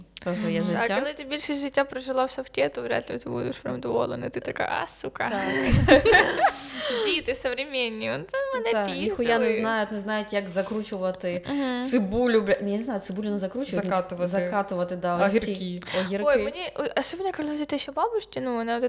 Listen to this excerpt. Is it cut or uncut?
uncut